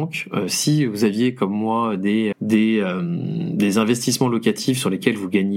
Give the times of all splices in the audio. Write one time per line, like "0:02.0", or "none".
0:02.3